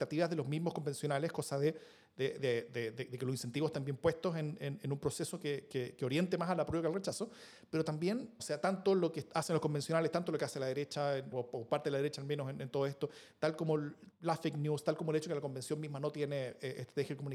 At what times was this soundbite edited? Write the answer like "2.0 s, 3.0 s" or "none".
8.4 s, 11.3 s, 14.1 s

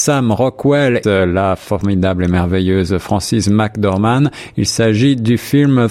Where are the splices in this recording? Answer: 1.0 s

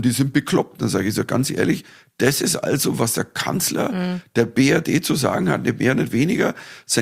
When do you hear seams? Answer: none

